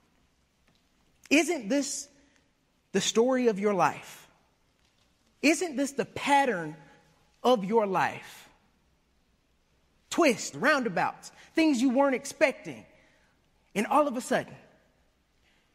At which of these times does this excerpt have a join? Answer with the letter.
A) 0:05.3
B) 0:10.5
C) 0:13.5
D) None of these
B